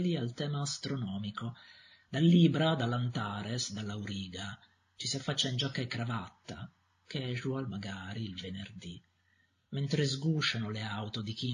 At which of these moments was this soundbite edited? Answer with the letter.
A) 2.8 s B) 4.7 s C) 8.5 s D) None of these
D